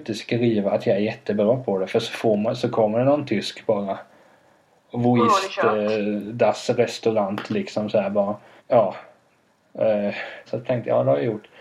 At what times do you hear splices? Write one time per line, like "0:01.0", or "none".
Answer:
0:08.6
0:10.5